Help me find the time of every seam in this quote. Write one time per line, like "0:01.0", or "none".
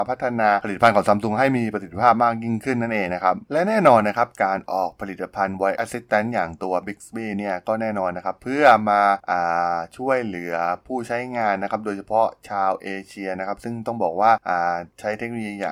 0:03.4